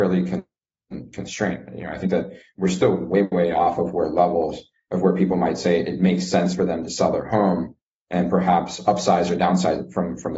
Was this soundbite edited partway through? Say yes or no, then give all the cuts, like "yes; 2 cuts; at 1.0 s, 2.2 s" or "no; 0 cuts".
no; 0 cuts